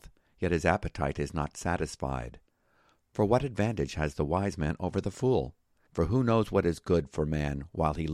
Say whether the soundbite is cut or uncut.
cut